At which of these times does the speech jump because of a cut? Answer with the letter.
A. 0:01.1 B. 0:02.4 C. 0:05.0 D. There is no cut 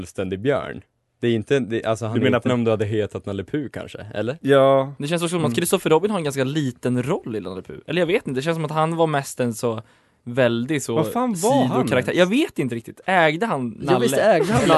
B